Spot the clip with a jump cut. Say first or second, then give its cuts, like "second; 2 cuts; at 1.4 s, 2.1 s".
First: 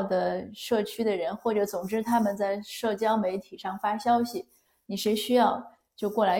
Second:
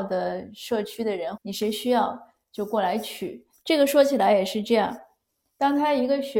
second; 2 cuts; at 1.4 s, 3.6 s